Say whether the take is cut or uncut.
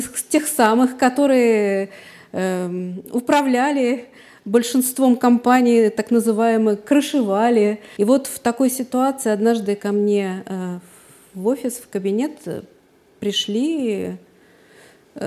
cut